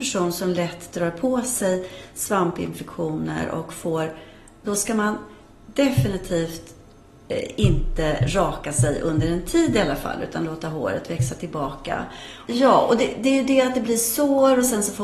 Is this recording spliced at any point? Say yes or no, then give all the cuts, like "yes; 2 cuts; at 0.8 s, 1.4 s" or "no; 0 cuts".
yes; 2 cuts; at 4.6 s, 12.5 s